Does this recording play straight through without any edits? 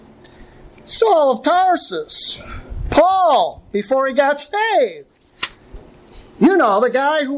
yes; 0 cuts

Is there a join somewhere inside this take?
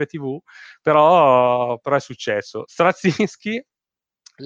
no; 0 cuts

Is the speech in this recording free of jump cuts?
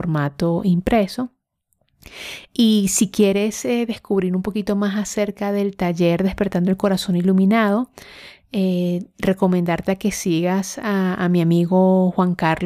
yes; 0 cuts

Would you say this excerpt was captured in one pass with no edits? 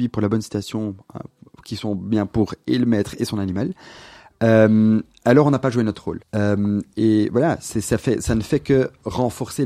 no; 1 cut; at 6.2 s

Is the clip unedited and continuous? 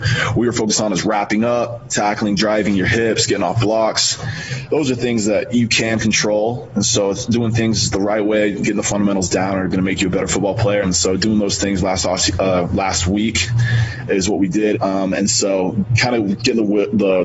no; 2 cuts; at 10.8 s, 14.7 s

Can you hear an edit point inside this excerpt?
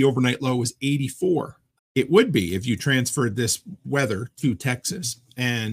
yes; 1 cut; at 1.8 s

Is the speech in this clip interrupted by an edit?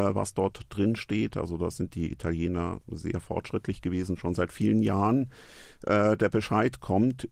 no; 0 cuts

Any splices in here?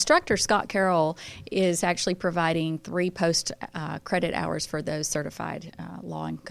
no; 0 cuts

